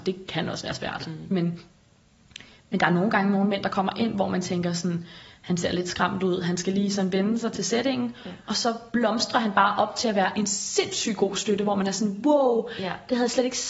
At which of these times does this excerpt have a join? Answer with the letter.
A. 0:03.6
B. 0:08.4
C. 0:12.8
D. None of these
D